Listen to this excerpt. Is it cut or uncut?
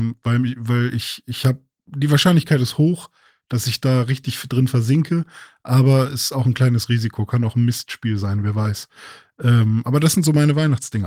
uncut